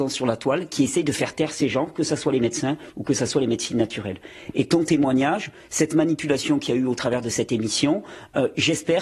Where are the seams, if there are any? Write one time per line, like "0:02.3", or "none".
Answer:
none